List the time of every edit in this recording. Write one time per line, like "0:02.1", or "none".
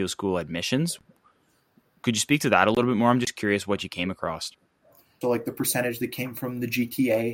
0:05.2